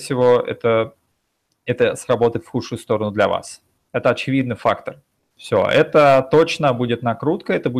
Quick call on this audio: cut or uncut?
cut